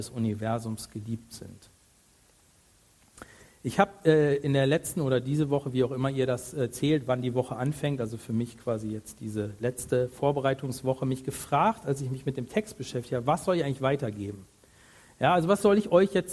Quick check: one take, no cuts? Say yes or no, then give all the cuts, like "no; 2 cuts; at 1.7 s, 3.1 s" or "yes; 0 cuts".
yes; 0 cuts